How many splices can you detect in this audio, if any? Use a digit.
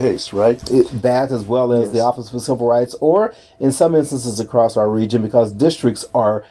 0